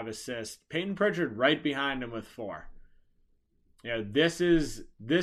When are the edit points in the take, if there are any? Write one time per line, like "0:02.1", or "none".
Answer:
none

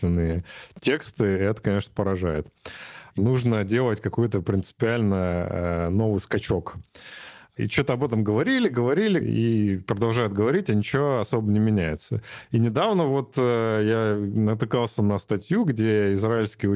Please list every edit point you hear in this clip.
0:03.1
0:09.2

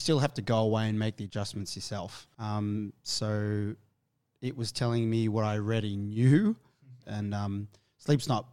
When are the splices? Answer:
0:02.3
0:07.0

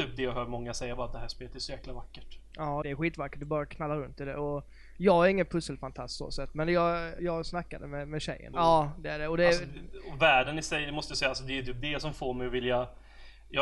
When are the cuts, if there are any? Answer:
0:02.8
0:07.2
0:08.5

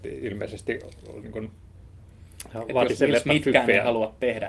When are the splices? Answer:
0:01.2

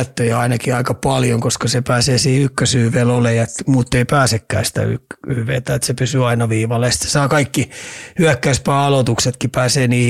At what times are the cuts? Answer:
none

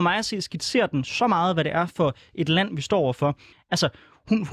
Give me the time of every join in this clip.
0:03.5

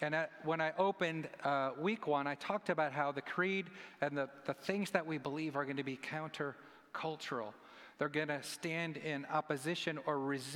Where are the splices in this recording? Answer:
none

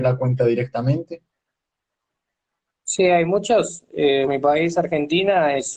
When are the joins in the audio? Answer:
0:04.3

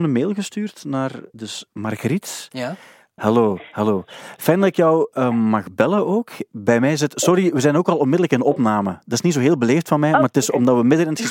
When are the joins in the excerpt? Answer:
0:01.3
0:03.2

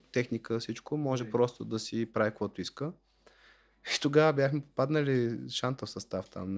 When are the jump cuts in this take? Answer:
none

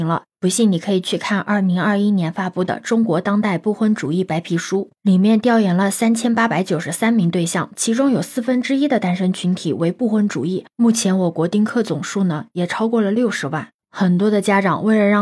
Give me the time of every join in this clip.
0:13.8

